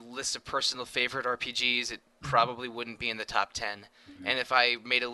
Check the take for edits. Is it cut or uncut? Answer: uncut